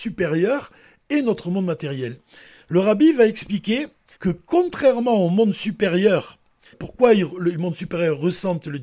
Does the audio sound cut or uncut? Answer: cut